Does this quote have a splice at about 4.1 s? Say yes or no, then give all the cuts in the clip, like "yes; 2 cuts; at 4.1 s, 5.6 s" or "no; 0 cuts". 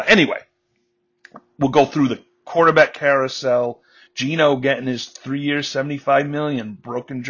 yes; 1 cut; at 4.1 s